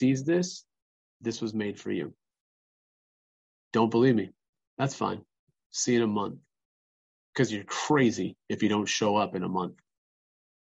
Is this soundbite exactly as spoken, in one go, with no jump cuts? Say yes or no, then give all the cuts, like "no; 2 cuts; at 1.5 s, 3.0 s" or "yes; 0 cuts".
no; 1 cut; at 5.6 s